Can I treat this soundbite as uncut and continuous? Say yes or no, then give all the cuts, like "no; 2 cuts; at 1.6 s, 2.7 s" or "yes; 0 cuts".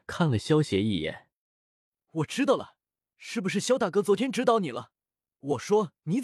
yes; 0 cuts